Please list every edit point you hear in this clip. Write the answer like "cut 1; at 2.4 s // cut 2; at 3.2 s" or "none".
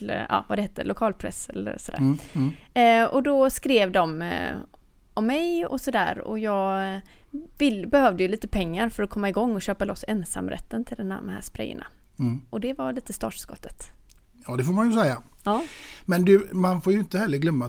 cut 1; at 5.7 s